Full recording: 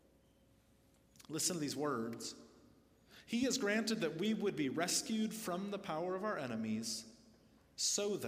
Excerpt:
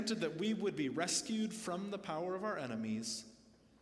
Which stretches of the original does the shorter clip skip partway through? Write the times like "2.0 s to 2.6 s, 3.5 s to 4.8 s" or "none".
none